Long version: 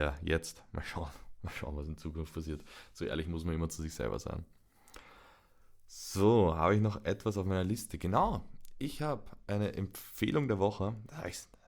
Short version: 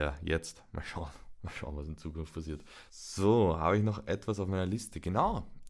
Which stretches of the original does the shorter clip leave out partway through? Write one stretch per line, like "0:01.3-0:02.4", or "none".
0:02.9-0:05.9